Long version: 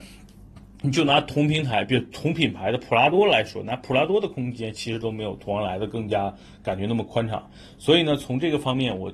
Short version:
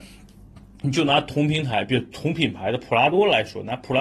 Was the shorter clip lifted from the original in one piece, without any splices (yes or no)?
yes